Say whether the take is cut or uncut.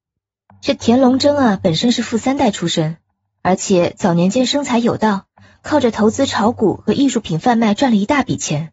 uncut